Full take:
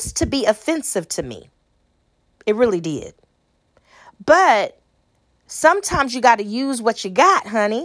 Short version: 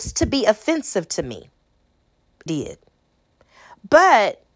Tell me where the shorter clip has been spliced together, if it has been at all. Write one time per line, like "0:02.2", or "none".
0:02.5